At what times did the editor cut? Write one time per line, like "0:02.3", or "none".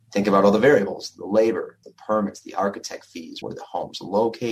0:01.8
0:03.4